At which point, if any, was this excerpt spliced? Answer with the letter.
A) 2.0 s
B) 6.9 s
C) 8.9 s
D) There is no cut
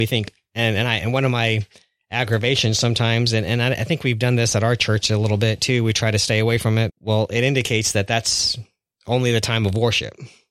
B